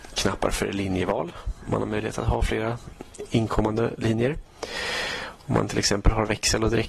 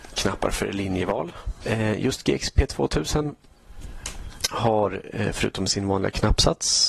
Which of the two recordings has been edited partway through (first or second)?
second